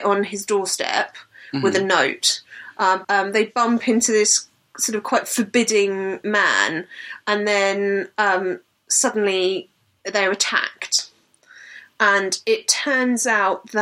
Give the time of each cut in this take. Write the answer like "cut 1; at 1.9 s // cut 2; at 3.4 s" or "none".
cut 1; at 3.0 s

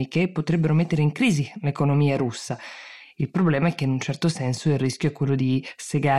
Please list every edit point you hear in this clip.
none

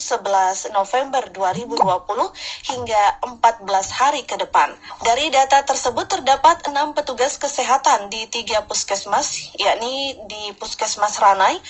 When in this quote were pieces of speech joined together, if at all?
cut 1; at 5.0 s

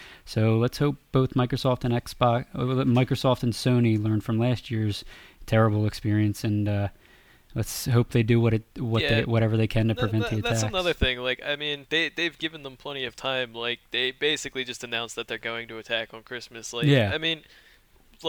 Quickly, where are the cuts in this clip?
none

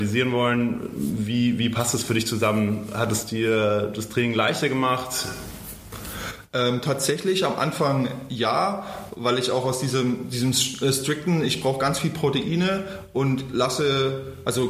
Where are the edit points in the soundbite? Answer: none

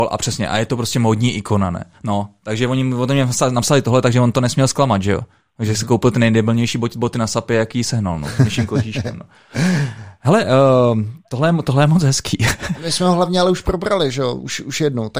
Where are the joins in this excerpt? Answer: cut 1; at 1.9 s // cut 2; at 12.8 s

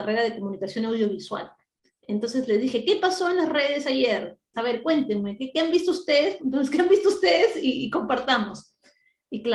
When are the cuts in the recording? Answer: cut 1; at 4.5 s // cut 2; at 6.4 s

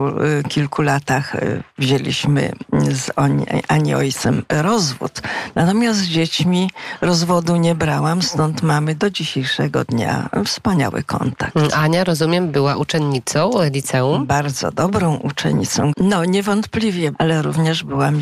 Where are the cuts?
cut 1; at 15.9 s // cut 2; at 17.1 s

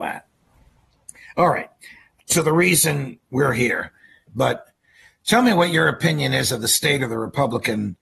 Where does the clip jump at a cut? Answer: cut 1; at 2.2 s // cut 2; at 4.3 s

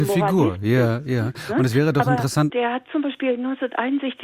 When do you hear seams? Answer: cut 1; at 2.5 s

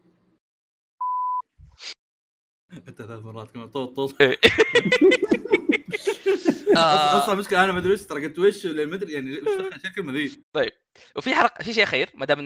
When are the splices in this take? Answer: cut 1; at 3.9 s // cut 2; at 10.4 s

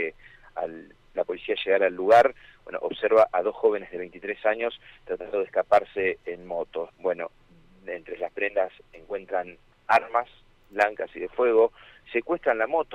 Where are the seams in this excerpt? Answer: cut 1; at 6.9 s

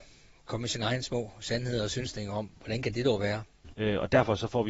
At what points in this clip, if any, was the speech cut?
cut 1; at 2.6 s // cut 2; at 3.7 s

